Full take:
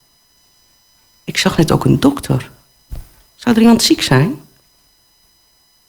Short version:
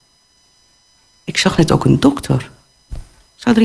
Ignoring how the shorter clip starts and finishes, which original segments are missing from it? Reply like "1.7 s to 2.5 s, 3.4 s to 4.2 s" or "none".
none